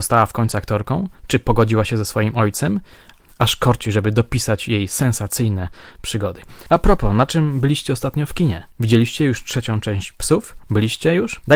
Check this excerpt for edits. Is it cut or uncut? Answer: cut